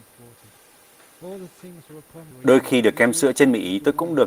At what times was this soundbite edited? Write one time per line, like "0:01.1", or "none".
0:02.3